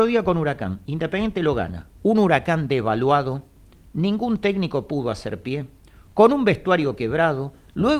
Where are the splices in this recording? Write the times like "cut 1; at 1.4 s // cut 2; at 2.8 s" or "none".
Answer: none